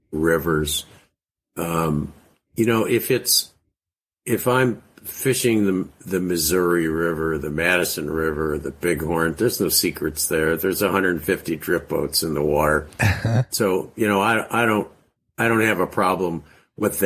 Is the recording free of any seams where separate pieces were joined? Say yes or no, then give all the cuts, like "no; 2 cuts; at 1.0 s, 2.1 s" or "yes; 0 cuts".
no; 1 cut; at 13.5 s